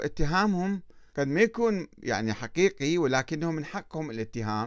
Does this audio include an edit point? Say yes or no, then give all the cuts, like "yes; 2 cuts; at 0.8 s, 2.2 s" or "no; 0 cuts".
yes; 1 cut; at 1.1 s